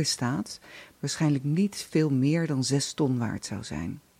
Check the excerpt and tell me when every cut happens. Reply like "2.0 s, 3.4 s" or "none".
0.9 s